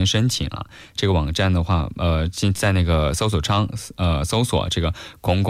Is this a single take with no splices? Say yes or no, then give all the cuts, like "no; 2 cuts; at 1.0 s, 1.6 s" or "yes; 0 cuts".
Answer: yes; 0 cuts